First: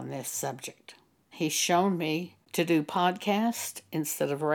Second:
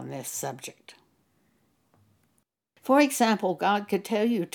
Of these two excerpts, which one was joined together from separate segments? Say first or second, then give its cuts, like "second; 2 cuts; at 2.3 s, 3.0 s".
first; 2 cuts; at 1.3 s, 2.4 s